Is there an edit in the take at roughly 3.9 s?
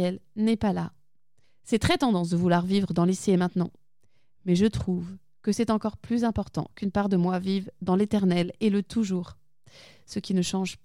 no; 1 cut; at 1.4 s

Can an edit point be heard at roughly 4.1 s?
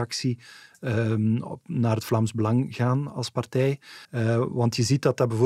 yes; 1 cut; at 4.1 s

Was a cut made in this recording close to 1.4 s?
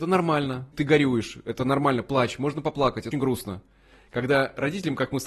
no; 1 cut; at 3.1 s

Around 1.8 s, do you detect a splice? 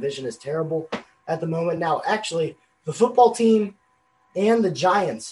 no; 0 cuts

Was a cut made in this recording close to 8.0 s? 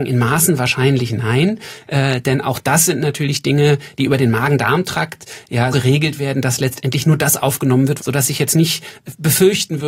yes; 2 cuts; at 5.7 s, 8.0 s

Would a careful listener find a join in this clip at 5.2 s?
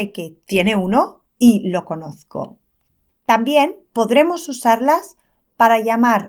no; 1 cut; at 3.1 s

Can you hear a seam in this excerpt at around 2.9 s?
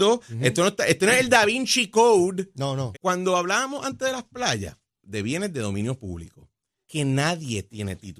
yes; 3 cuts; at 2.9 s, 5.0 s, 6.8 s

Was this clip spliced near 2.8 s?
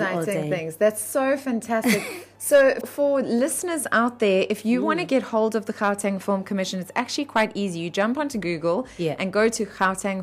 yes; 1 cut; at 2.8 s

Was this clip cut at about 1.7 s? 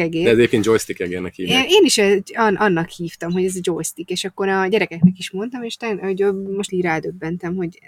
no; 1 cut; at 6.7 s

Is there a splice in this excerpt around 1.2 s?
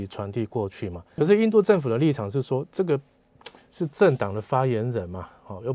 yes; 1 cut; at 1.2 s

